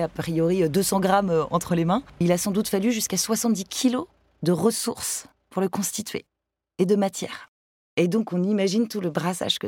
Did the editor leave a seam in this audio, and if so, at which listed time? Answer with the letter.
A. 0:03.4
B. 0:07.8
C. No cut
C